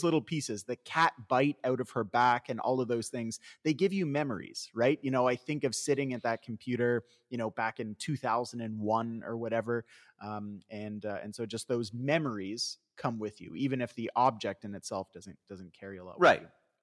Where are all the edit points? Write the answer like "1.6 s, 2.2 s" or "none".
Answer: none